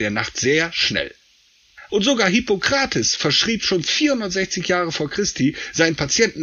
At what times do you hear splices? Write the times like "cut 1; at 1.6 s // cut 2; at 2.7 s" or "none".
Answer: cut 1; at 1.9 s